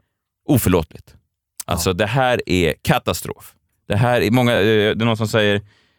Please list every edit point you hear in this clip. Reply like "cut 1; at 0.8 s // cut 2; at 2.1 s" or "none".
none